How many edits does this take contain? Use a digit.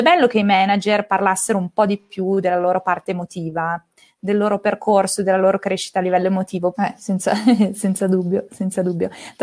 1